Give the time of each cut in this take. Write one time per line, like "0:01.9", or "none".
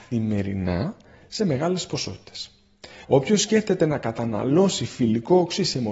0:03.0